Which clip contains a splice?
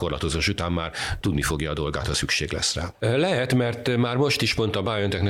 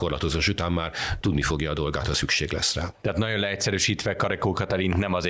first; 1 cut; at 3.0 s

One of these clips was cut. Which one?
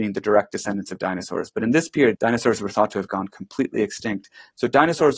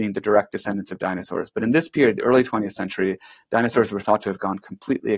first; 1 cut; at 2.1 s

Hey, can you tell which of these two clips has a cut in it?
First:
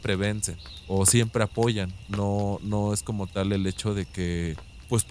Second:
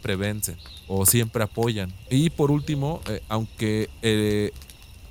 second; 1 cut; at 2.1 s

